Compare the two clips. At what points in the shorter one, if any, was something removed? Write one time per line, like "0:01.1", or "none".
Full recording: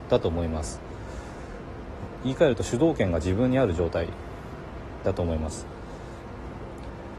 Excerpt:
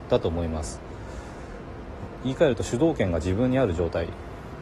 none